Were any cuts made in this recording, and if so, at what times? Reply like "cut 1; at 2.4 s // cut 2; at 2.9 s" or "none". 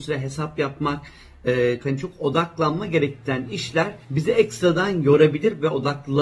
cut 1; at 1.8 s // cut 2; at 4.0 s